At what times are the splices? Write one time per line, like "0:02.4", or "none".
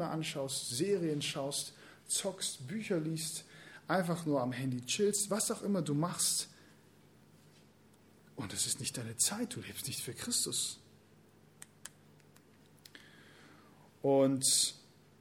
none